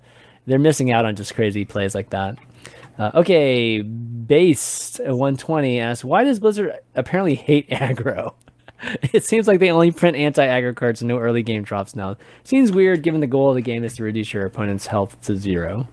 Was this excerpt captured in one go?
yes; 0 cuts

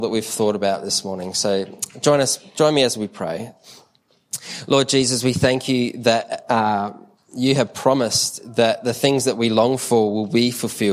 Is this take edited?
no; 0 cuts

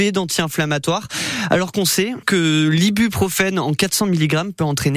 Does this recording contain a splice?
yes; 1 cut; at 2.2 s

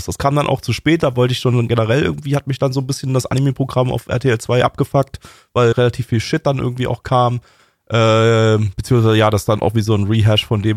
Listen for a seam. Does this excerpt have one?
yes; 1 cut; at 5.7 s

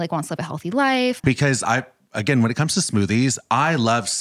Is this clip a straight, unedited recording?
no; 1 cut; at 1.2 s

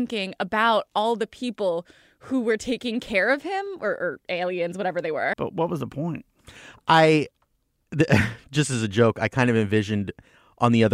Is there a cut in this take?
yes; 1 cut; at 5.3 s

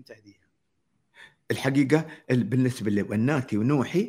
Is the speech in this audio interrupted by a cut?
no; 0 cuts

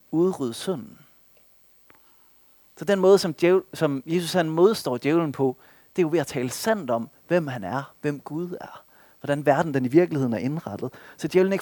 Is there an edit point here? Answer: no; 0 cuts

